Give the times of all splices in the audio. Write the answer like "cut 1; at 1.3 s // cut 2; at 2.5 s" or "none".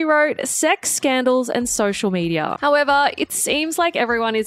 cut 1; at 2.6 s